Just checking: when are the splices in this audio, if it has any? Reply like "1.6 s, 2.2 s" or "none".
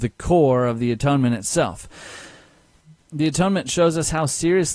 3.0 s